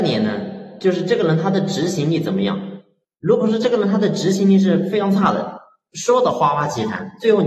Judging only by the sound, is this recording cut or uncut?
uncut